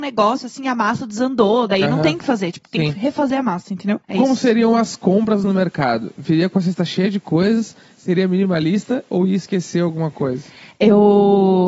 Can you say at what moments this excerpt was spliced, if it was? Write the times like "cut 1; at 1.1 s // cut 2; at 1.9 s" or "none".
cut 1; at 4.0 s